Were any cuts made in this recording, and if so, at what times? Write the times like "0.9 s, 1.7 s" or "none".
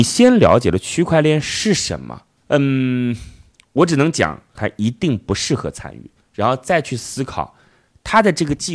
2.4 s, 4.6 s, 6.3 s